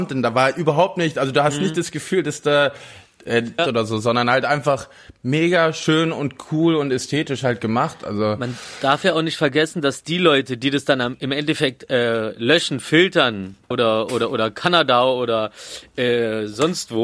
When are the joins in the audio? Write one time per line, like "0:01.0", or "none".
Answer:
0:03.6
0:13.7